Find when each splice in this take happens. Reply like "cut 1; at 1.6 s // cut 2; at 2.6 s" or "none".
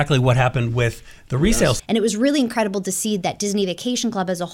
cut 1; at 1.8 s